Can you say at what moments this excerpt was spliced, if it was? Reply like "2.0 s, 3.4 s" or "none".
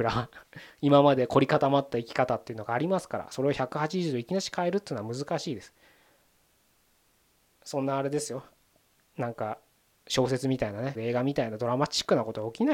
11.0 s